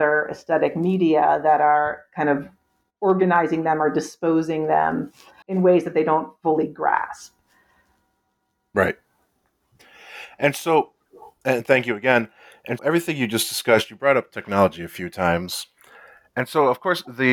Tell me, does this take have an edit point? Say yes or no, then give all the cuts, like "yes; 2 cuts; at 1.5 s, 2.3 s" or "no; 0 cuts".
yes; 2 cuts; at 5.4 s, 12.8 s